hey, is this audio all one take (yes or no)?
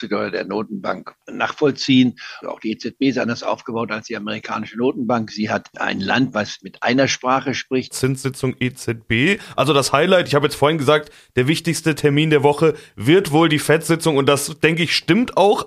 no